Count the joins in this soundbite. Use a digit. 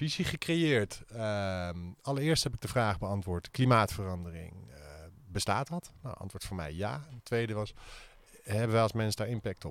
1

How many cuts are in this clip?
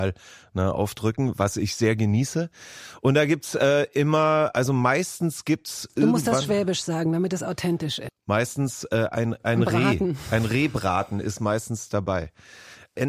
1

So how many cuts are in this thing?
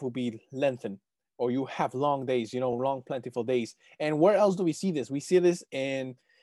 0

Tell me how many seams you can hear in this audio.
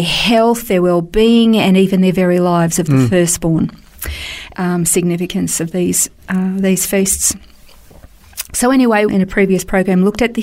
2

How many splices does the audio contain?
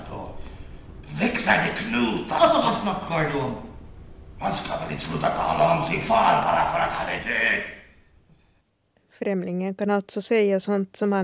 0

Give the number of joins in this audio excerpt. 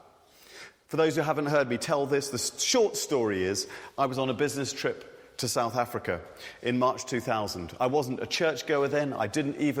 0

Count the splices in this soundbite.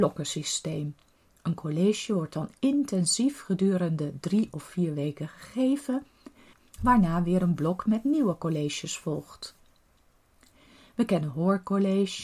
0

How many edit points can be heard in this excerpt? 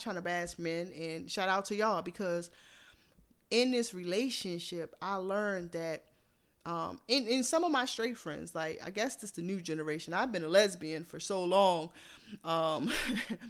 0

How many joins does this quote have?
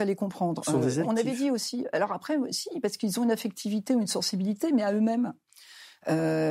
1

